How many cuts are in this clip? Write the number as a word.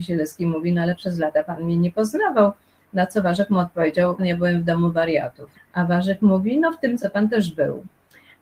three